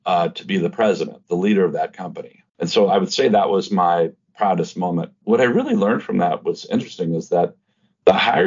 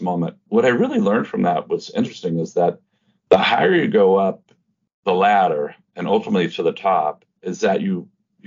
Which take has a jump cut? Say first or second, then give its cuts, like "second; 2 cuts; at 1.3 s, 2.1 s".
first; 1 cut; at 2.5 s